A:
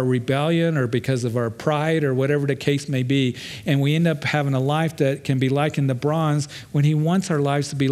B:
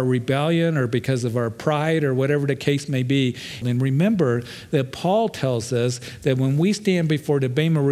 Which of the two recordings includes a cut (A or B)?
B